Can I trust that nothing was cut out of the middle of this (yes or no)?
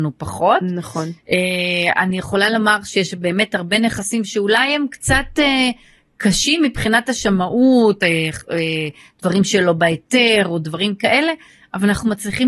yes